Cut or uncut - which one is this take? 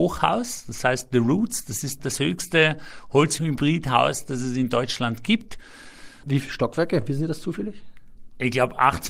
uncut